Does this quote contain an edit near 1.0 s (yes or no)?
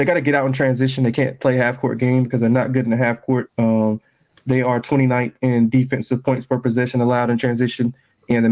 no